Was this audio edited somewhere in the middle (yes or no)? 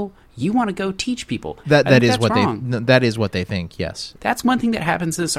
yes